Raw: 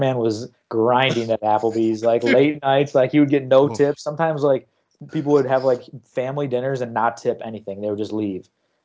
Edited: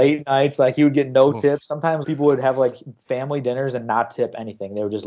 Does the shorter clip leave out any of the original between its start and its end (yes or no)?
yes